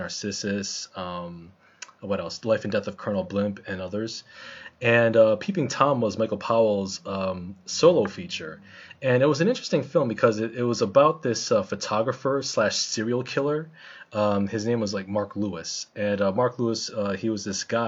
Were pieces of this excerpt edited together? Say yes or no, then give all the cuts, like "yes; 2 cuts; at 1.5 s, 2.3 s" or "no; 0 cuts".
no; 0 cuts